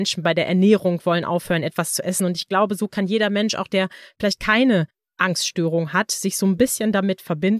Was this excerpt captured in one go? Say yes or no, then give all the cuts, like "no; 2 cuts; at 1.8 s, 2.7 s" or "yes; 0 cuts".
yes; 0 cuts